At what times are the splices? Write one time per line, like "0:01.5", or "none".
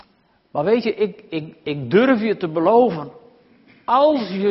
none

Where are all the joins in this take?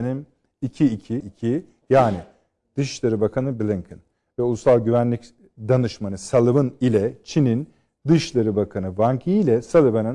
0:01.2

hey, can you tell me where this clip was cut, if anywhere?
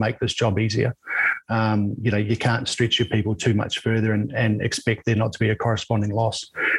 none

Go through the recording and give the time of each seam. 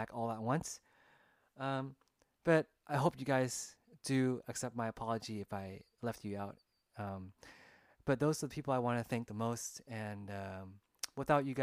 none

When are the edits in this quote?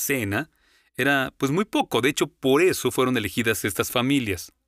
none

